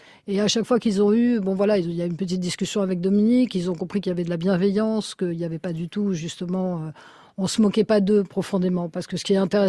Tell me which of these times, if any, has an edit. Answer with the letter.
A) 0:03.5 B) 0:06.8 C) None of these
C